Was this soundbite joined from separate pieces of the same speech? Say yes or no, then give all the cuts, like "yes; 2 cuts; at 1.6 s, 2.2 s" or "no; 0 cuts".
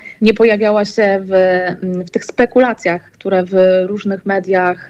no; 0 cuts